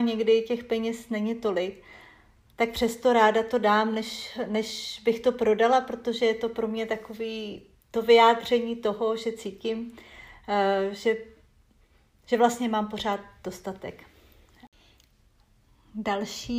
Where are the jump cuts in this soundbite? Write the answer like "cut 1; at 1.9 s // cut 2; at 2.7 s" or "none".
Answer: none